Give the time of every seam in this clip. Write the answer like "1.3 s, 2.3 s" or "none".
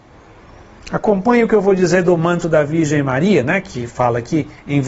none